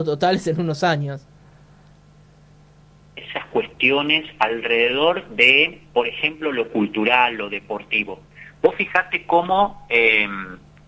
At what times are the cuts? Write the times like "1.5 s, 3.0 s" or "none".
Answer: none